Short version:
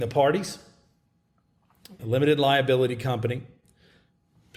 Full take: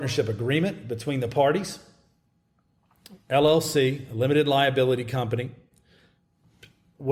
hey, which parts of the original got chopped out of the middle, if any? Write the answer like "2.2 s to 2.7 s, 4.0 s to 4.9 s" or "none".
3.2 s to 4.1 s